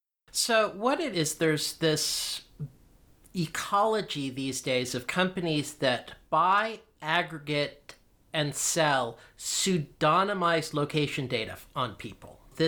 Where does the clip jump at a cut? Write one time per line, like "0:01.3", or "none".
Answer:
none